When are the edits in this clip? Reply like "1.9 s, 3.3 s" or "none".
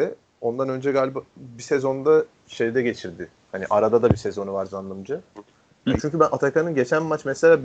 6.0 s